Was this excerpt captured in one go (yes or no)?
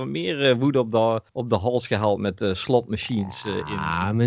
no